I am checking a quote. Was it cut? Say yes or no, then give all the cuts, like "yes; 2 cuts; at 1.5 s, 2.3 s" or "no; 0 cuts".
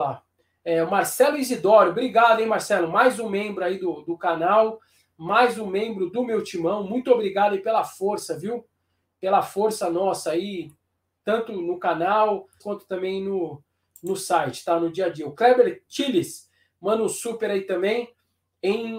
yes; 1 cut; at 12.6 s